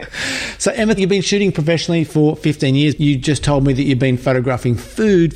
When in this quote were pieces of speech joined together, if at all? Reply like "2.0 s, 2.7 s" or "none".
1.0 s, 3.0 s